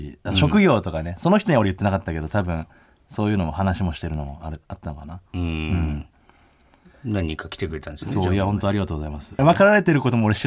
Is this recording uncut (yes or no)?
no